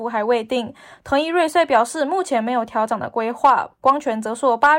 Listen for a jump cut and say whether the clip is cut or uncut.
uncut